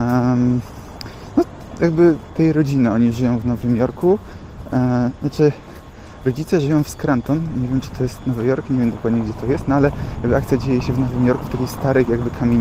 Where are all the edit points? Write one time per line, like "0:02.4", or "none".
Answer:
none